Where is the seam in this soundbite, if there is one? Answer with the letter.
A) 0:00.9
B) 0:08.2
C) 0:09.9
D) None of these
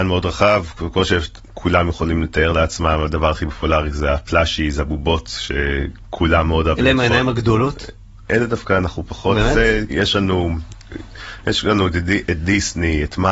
C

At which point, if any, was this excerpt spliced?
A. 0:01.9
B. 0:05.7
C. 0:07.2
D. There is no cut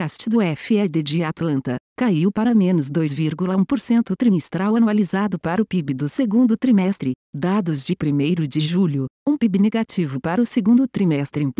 A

